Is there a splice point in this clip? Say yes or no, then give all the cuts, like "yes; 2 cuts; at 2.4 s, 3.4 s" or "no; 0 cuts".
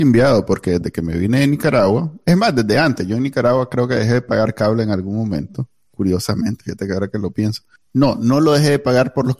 no; 0 cuts